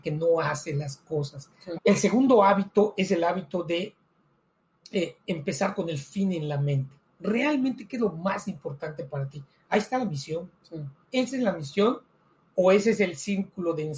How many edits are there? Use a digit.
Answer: 1